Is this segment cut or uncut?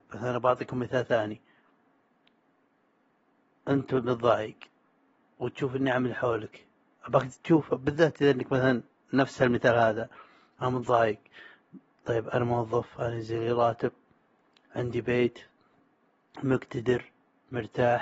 uncut